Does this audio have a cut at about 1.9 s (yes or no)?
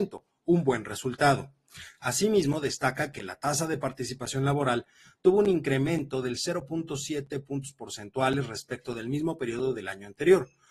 no